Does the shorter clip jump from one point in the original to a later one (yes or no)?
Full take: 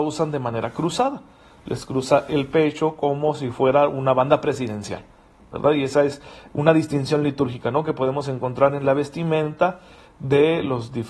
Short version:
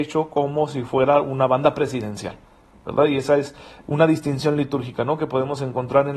no